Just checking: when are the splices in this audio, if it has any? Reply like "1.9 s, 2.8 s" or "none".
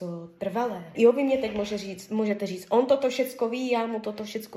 0.9 s